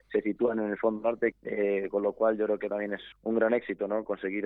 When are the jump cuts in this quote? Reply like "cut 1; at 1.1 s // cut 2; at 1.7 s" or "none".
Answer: cut 1; at 1.3 s // cut 2; at 3.1 s

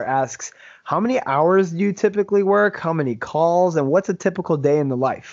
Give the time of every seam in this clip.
none

